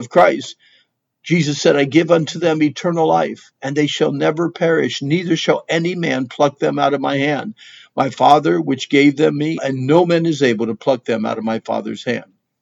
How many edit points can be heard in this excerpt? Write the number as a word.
one